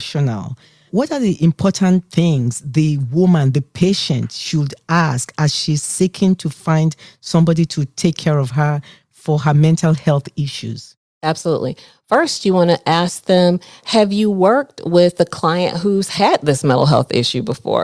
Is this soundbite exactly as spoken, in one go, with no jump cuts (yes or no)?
yes